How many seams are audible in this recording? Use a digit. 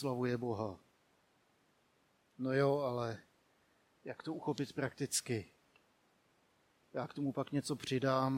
1